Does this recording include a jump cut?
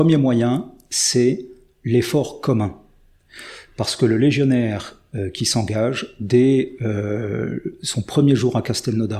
no; 0 cuts

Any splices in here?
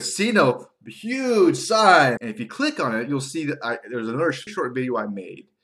yes; 2 cuts; at 2.2 s, 4.5 s

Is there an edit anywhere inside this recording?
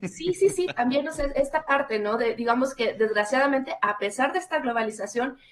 no; 0 cuts

